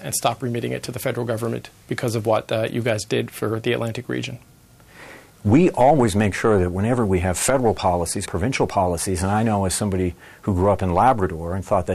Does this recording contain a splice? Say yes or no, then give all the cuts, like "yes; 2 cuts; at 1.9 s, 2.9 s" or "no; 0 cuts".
yes; 2 cuts; at 5.3 s, 8.2 s